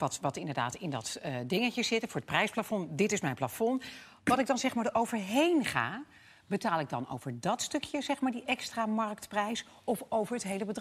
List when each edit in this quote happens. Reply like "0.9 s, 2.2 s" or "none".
none